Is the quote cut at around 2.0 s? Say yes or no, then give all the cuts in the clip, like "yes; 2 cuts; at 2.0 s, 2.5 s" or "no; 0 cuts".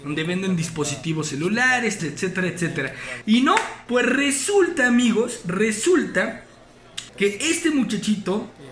yes; 3 cuts; at 2.0 s, 3.2 s, 7.1 s